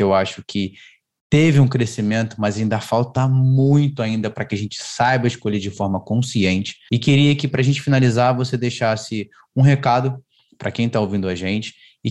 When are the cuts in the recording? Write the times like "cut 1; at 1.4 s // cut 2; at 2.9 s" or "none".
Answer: cut 1; at 6.9 s